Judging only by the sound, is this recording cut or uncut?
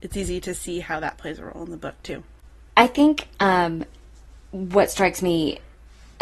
uncut